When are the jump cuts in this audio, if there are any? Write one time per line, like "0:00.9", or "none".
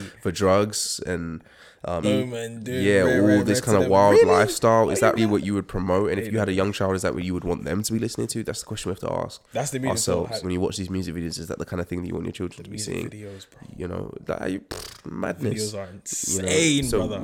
0:02.0
0:05.2
0:10.4